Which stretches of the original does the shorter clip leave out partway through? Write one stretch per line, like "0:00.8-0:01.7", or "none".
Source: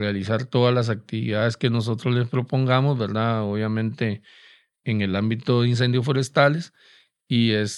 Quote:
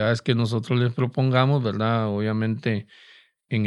none